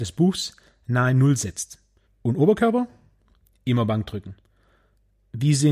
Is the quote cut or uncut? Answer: cut